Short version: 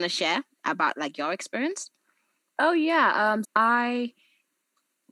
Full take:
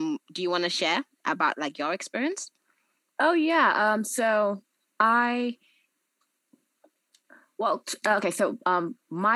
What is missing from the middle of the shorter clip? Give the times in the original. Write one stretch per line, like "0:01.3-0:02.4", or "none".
0:04.0-0:04.9